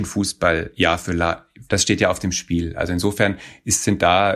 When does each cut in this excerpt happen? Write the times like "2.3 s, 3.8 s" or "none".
1.7 s